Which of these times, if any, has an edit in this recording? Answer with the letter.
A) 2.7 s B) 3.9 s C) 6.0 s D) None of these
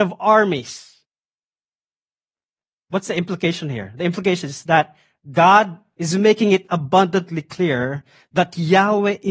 C